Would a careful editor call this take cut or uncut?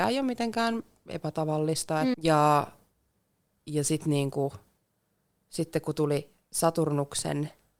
cut